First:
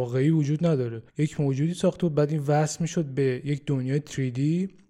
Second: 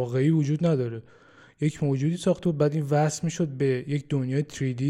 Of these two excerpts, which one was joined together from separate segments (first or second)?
first